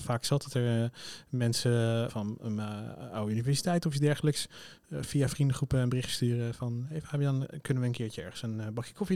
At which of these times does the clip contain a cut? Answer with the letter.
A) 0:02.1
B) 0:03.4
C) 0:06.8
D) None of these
A